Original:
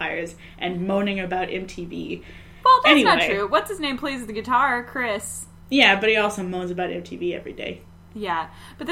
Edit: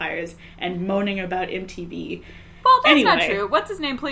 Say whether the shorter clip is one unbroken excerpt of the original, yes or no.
yes